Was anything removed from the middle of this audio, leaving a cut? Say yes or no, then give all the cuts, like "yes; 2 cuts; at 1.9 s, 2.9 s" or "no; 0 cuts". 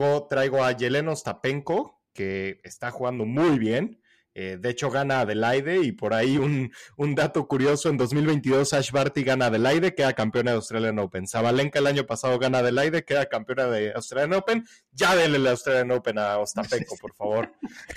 no; 0 cuts